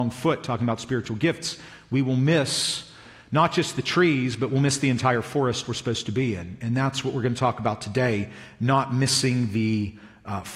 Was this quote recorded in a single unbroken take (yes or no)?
yes